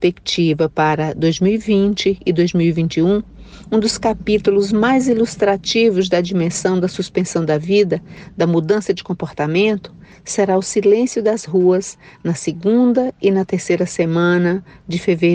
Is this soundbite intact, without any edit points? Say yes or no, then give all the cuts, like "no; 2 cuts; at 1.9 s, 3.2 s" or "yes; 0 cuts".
yes; 0 cuts